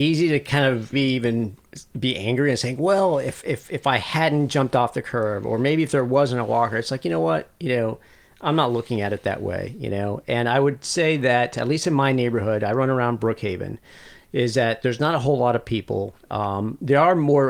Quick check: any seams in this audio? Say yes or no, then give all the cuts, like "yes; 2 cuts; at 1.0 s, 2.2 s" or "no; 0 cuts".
yes; 1 cut; at 0.9 s